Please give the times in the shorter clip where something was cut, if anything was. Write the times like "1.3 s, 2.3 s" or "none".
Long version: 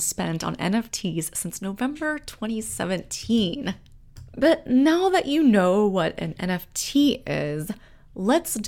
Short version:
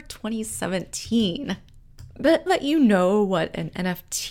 2.5 s